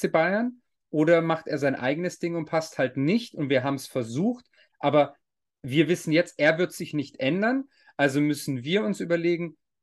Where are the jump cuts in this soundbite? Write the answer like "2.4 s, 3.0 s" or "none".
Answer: none